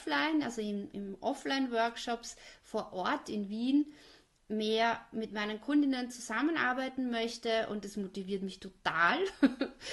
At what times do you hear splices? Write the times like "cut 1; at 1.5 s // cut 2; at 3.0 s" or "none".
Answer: none